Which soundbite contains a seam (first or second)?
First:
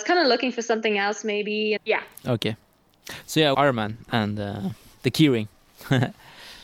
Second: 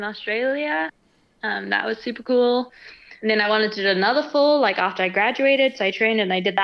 first